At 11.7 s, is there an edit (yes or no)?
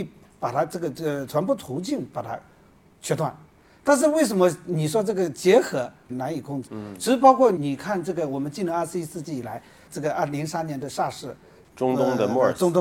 no